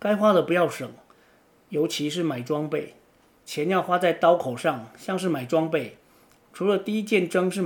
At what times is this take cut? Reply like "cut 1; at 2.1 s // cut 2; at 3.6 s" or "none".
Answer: cut 1; at 3.4 s